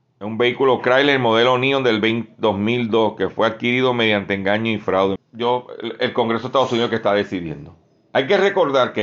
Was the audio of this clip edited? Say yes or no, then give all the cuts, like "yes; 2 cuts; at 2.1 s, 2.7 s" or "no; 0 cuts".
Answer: yes; 1 cut; at 5.2 s